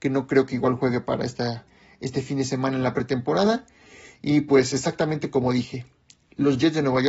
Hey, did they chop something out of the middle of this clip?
no; 0 cuts

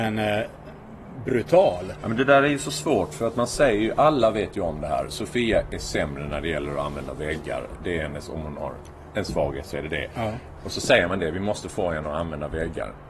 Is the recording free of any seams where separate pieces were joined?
yes; 0 cuts

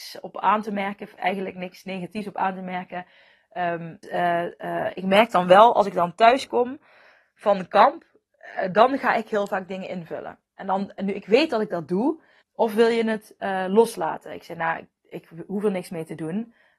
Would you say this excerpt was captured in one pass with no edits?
no; 2 cuts; at 4.0 s, 12.4 s

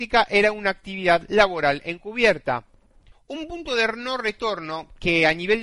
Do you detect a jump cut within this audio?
yes; 1 cut; at 3.1 s

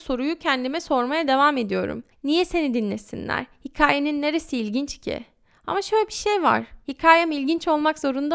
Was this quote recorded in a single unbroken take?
yes; 0 cuts

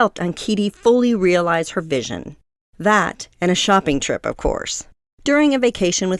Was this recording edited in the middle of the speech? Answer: no; 0 cuts

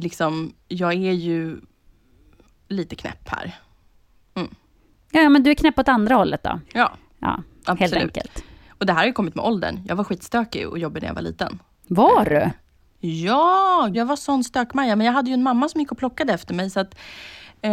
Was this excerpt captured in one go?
no; 2 cuts; at 6.6 s, 13.9 s

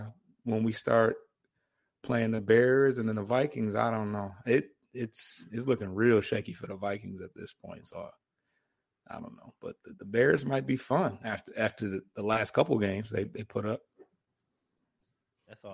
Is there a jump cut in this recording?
no; 0 cuts

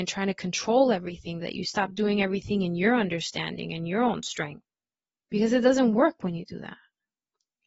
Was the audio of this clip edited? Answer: yes; 1 cut; at 1.4 s

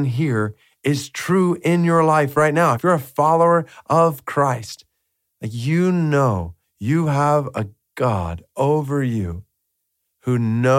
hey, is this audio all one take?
yes; 0 cuts

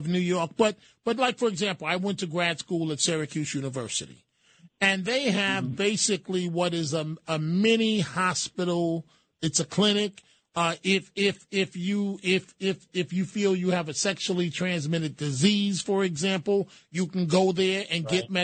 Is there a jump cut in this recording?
no; 0 cuts

